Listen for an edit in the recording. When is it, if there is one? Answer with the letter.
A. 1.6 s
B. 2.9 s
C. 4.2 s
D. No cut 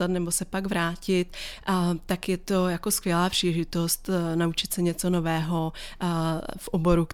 D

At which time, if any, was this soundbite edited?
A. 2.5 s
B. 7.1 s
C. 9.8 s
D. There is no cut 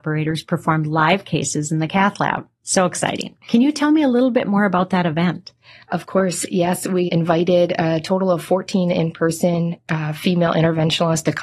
B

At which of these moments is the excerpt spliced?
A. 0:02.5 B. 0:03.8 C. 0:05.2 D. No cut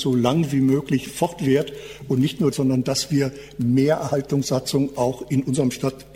A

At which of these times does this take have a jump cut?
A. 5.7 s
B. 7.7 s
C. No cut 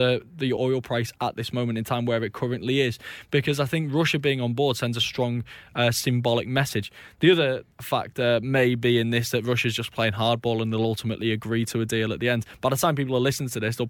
B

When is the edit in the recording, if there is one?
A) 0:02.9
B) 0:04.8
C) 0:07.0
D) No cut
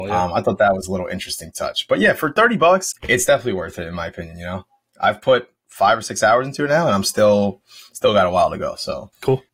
A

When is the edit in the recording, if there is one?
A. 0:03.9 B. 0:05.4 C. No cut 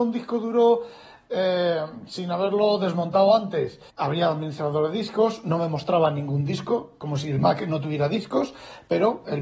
A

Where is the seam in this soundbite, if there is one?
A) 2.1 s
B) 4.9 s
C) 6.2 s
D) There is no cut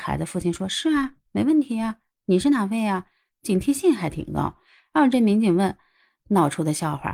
C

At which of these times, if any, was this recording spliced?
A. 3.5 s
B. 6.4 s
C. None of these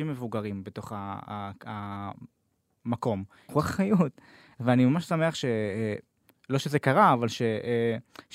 A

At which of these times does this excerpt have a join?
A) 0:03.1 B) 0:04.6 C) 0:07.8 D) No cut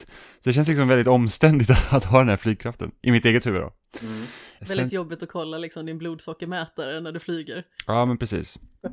B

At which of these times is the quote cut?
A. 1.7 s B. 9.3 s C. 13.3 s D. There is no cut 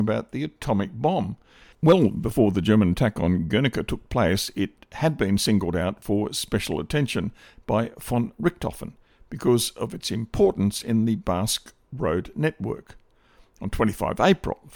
A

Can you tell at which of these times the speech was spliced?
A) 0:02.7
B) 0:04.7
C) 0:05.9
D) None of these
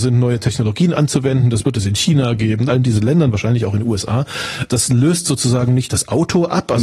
A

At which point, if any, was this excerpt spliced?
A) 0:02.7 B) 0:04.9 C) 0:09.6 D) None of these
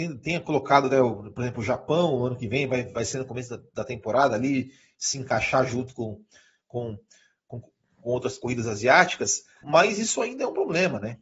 C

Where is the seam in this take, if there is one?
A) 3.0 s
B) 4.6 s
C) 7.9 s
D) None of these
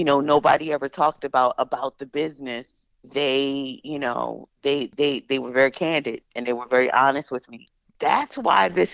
C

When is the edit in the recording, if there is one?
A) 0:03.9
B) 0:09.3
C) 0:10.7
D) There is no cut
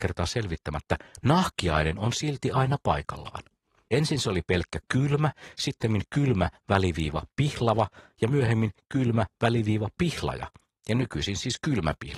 A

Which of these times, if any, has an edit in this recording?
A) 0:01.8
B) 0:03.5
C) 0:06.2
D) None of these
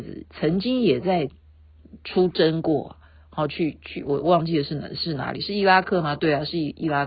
D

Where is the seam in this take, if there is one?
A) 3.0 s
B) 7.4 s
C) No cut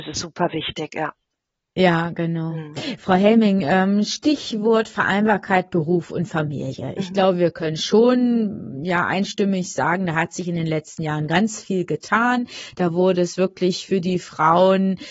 C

